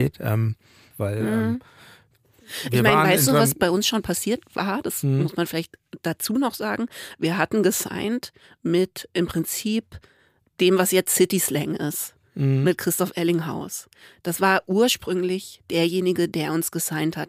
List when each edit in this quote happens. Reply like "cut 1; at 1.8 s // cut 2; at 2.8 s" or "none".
cut 1; at 0.9 s